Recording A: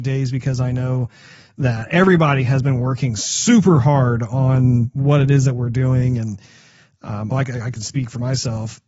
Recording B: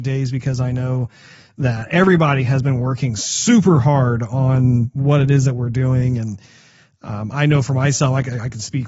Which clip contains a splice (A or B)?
A